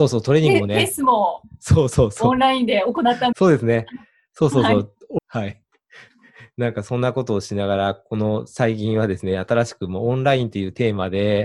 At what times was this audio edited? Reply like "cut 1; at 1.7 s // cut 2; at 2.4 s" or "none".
cut 1; at 3.3 s // cut 2; at 5.2 s